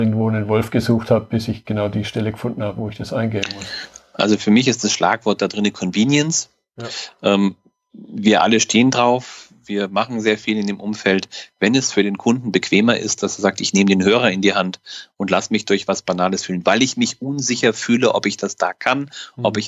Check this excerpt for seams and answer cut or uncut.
uncut